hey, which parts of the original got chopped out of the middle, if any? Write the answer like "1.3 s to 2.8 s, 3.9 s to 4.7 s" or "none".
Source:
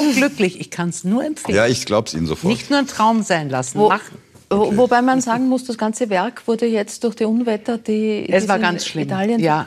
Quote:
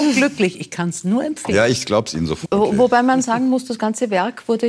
2.4 s to 4.4 s